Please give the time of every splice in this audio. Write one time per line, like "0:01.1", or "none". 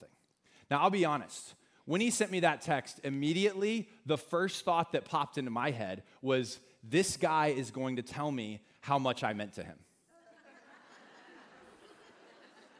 none